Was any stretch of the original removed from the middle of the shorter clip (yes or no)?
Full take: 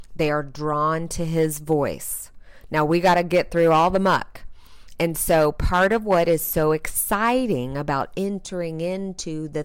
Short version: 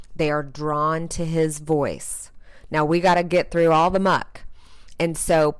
no